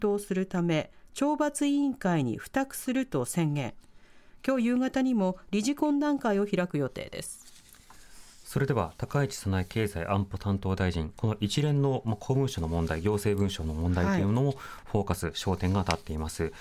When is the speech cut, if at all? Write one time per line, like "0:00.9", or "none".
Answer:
0:11.1